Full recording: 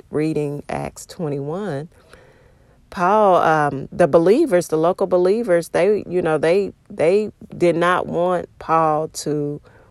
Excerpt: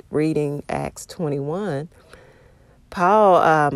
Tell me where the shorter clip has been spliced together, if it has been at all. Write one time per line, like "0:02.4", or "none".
none

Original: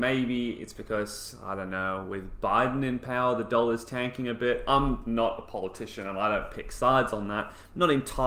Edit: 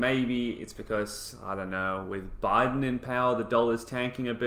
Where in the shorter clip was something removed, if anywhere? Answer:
none

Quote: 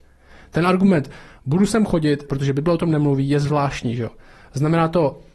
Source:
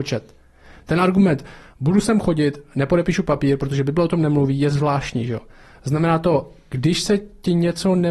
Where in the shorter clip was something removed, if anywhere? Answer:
0:02.3

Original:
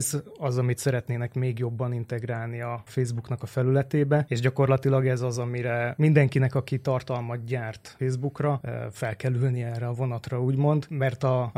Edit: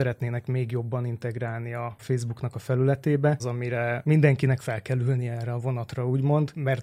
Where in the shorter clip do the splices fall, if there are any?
0:03.4
0:04.6

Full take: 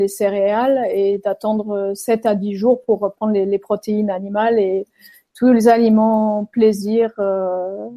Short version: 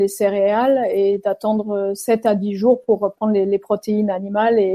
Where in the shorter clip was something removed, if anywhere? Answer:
none

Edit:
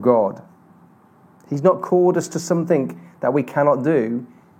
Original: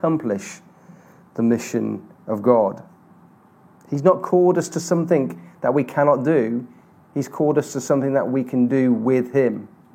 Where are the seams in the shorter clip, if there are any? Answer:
none

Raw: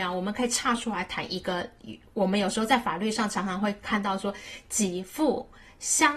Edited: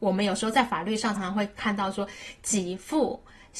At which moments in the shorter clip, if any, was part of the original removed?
0:01.2

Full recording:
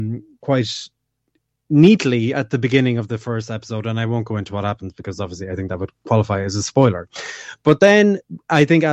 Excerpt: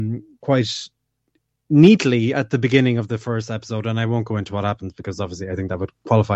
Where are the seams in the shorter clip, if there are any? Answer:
none

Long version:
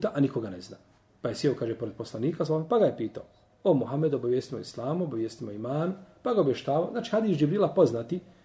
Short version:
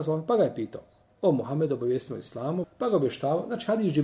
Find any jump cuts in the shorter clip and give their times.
0:02.6

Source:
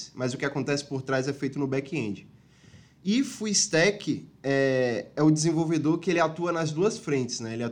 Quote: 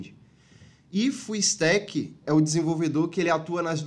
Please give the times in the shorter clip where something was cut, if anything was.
0:02.2

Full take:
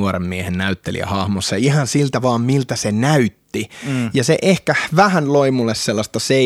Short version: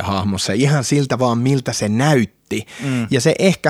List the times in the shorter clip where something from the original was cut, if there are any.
none

